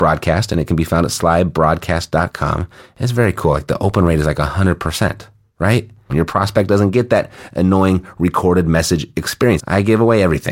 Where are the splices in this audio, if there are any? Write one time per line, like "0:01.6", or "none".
0:06.1
0:09.6

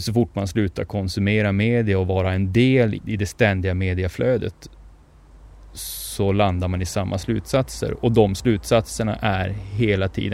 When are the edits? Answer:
0:03.0

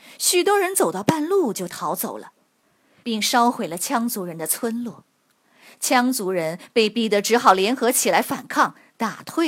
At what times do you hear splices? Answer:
0:03.0

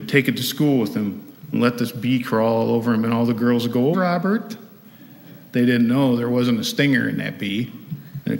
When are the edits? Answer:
0:03.9

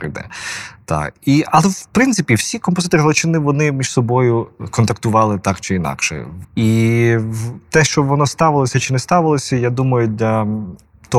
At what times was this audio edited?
0:06.4

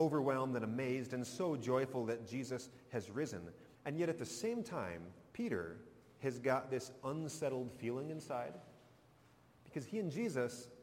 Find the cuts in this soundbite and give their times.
0:03.7

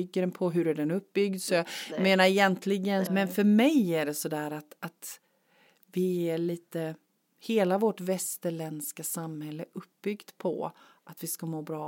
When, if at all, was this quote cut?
0:03.1

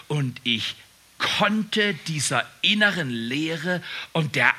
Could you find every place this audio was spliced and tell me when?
none

